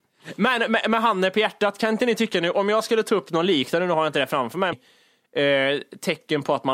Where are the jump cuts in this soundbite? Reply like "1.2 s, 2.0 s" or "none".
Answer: 4.7 s

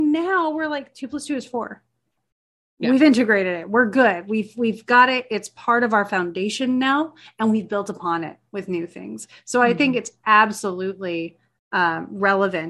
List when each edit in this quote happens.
none

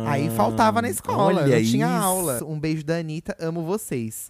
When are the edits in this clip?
2.4 s

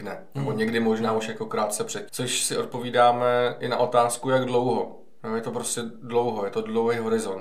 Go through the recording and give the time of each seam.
2.1 s

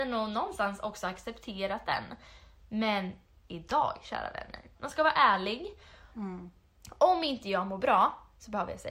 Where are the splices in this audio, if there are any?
4.8 s, 6.1 s

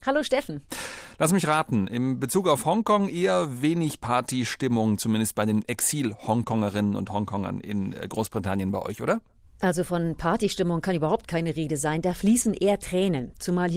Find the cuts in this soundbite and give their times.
none

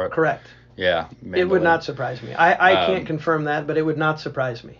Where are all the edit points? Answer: 1.1 s

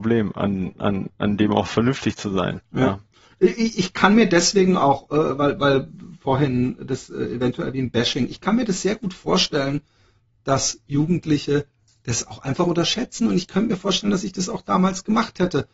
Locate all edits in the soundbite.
none

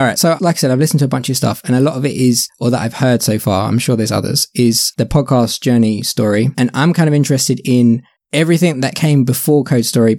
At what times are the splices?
none

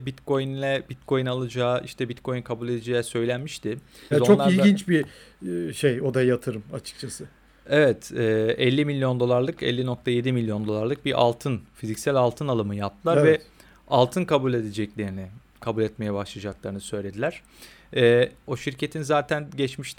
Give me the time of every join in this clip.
4.1 s

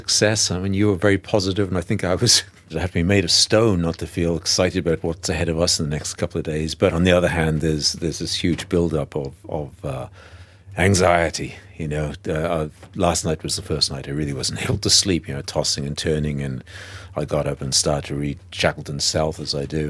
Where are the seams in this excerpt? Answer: 2.7 s

